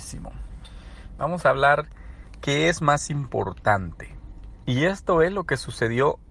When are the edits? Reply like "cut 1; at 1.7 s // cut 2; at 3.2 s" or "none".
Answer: cut 1; at 1.2 s // cut 2; at 4.6 s